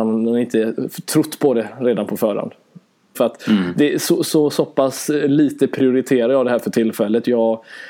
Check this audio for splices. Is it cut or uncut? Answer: cut